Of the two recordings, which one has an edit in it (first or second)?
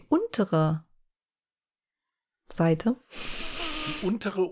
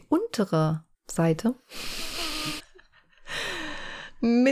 second